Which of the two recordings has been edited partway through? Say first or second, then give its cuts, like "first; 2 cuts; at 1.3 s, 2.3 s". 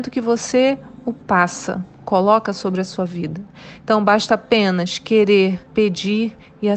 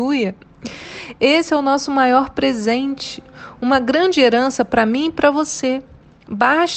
first; 1 cut; at 5.7 s